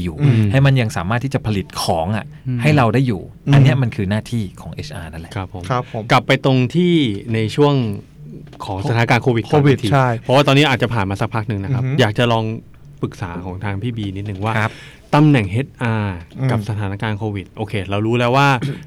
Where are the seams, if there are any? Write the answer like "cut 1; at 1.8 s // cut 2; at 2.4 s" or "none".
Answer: none